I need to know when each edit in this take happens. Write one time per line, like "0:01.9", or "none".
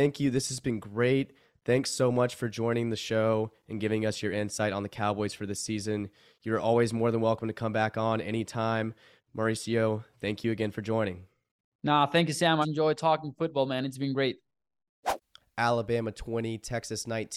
0:09.2
0:12.6
0:15.4

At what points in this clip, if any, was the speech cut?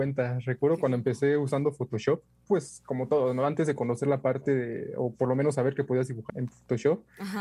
0:02.4
0:06.3

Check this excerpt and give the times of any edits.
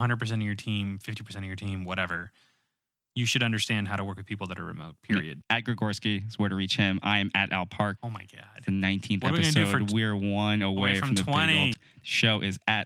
0:05.4
0:08.0
0:11.7

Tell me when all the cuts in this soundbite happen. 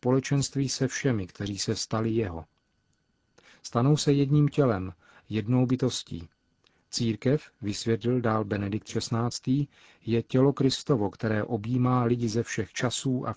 none

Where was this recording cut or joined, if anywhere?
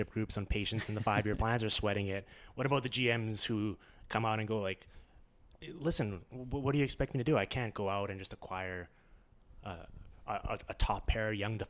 none

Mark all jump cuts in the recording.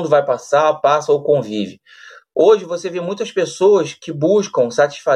none

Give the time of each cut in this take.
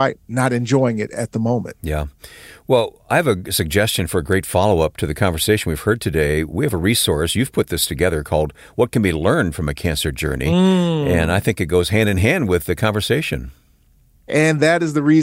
none

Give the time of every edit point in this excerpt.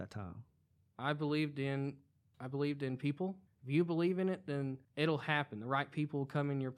0:02.3
0:03.5
0:04.8

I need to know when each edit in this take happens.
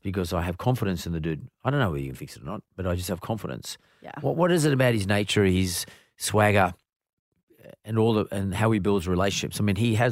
none

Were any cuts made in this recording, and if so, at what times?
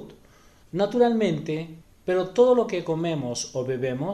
0:01.9

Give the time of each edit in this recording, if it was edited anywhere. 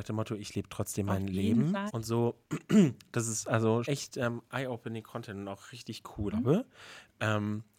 0:01.9
0:03.8
0:06.3

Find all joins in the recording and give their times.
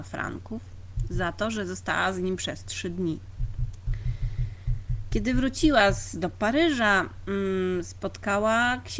none

